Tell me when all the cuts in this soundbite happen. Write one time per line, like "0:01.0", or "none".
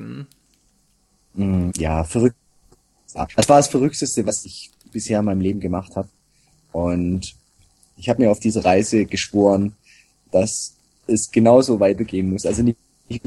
0:01.7

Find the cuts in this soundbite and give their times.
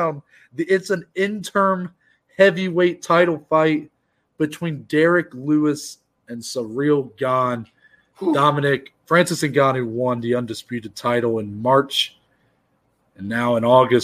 none

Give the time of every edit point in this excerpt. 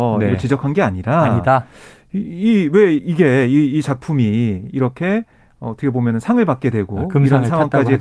0:03.0

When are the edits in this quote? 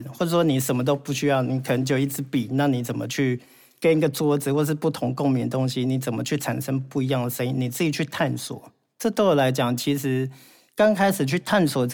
none

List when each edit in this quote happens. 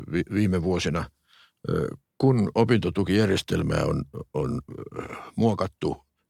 none

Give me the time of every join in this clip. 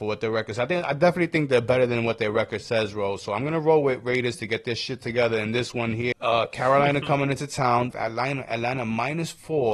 0:06.1
0:07.9

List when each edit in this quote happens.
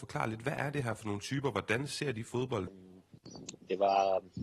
0:02.7

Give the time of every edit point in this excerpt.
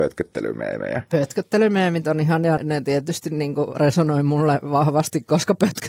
0:02.6

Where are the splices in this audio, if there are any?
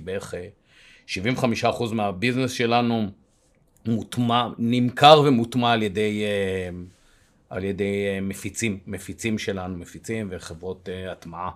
none

